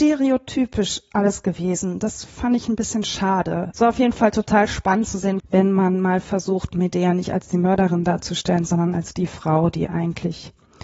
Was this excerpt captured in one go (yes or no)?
no